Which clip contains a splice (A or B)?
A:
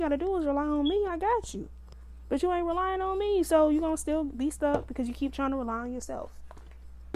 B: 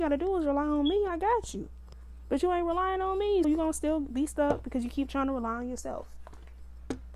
B